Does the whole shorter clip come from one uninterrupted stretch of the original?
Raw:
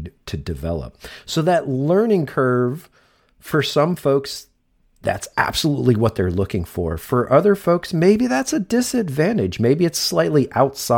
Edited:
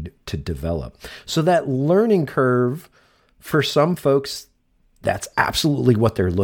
yes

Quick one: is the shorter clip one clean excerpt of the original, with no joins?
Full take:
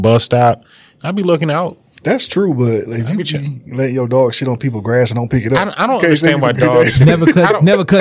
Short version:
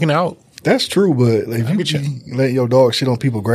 yes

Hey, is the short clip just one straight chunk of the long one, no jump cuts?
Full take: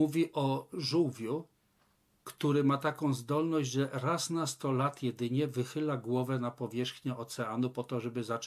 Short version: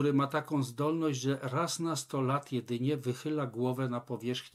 yes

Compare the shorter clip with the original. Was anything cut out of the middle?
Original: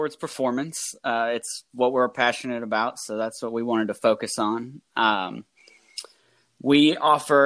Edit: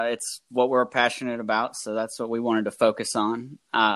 no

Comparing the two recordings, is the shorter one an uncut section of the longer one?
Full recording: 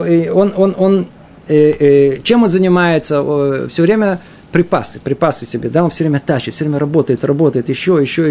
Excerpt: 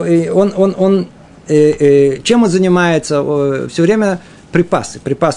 yes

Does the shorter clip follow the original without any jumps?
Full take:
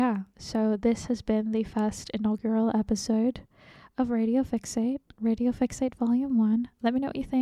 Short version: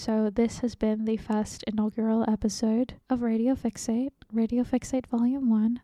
no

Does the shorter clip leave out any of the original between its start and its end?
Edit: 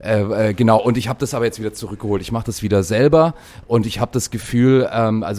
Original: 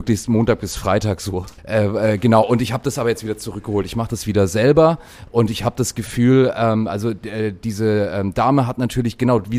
no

